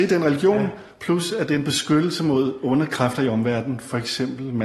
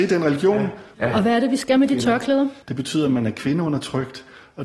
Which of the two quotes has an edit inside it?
second; 2 cuts; at 0.9 s, 2.6 s

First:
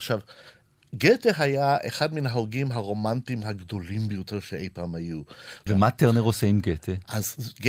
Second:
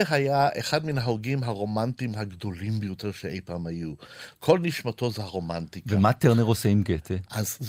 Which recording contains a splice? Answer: first; 1 cut; at 5.7 s

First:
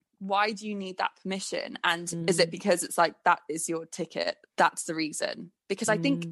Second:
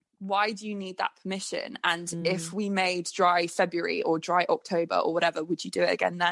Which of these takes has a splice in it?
first; 2 cuts; at 2.2 s, 4.5 s

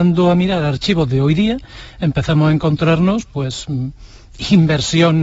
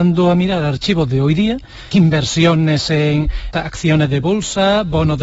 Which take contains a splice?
second; 2 cuts; at 1.9 s, 3.5 s

